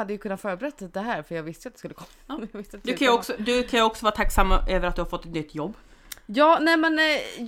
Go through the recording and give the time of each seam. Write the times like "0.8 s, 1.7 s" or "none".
none